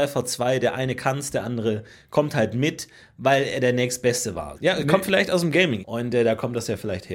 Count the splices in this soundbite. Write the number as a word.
two